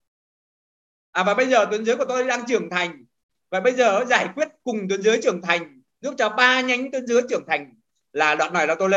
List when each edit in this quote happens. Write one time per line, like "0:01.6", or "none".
none